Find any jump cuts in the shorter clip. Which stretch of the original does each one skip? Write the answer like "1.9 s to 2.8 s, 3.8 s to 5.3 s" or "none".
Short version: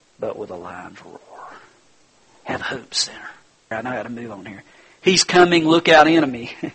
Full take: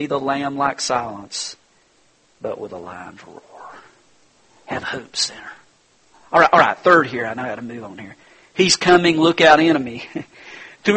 5.9 s to 7.2 s